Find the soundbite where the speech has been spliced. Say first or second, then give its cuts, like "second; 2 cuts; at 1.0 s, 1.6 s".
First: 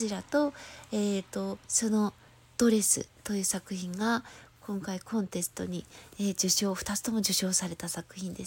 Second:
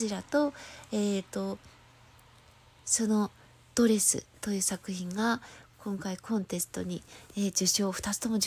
first; 1 cut; at 1.6 s